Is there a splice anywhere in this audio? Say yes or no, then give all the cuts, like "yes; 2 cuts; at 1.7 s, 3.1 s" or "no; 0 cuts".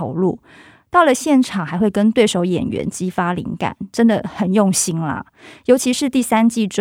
no; 0 cuts